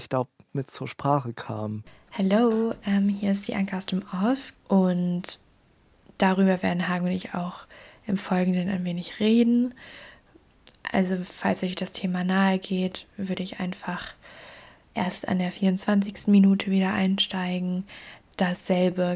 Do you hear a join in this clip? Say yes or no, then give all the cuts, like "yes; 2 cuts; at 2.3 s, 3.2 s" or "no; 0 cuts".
yes; 1 cut; at 4.5 s